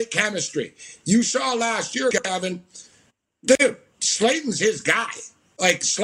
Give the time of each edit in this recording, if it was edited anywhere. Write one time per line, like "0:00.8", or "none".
none